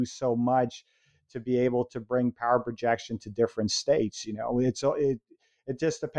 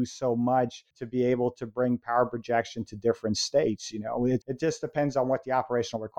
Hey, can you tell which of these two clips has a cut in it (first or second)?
second